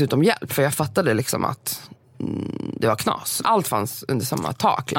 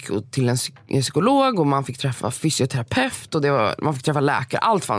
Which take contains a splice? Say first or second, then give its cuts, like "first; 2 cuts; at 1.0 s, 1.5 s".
first; 1 cut; at 3.4 s